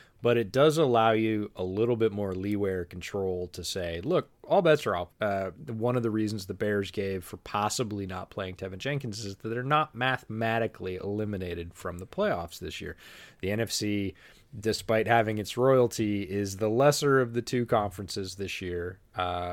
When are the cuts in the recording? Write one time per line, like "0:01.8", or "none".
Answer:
0:05.1